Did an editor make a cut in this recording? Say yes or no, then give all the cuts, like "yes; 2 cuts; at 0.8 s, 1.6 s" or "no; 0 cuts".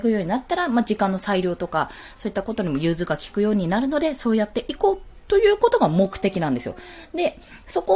no; 0 cuts